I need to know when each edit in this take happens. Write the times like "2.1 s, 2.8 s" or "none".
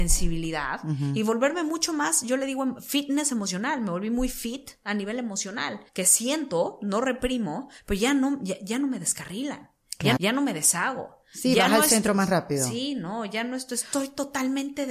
5.9 s, 10.2 s